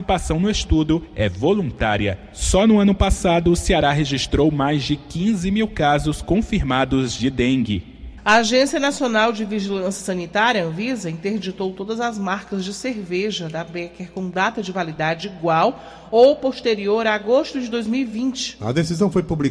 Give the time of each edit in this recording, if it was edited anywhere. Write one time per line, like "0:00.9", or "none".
0:08.2